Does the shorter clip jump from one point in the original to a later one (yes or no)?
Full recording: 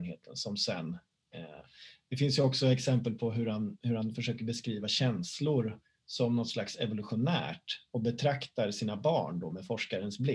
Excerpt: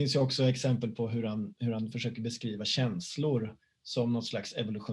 no